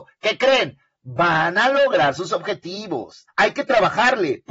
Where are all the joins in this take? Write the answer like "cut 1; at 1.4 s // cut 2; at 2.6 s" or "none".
cut 1; at 3.3 s

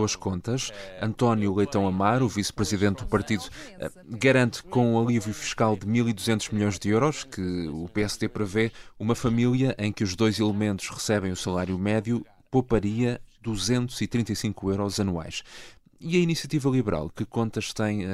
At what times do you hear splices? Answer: none

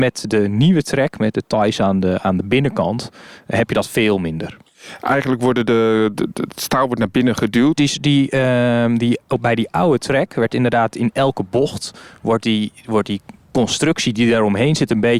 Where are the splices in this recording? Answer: cut 1; at 6.1 s // cut 2; at 7.7 s

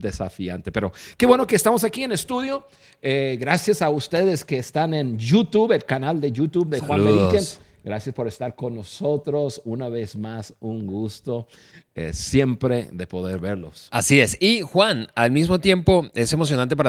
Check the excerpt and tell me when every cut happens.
none

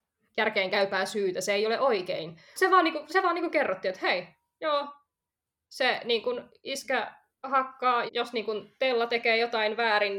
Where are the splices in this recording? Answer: cut 1; at 2.6 s // cut 2; at 8.1 s

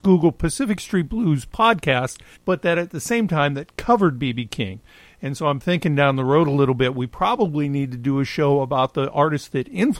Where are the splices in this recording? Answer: cut 1; at 2.3 s

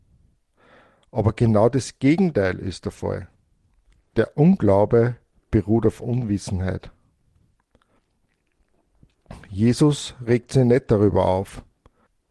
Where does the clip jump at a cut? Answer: none

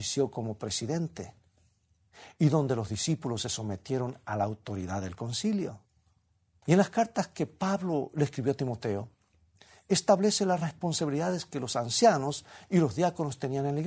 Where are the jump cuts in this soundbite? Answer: cut 1; at 6.6 s

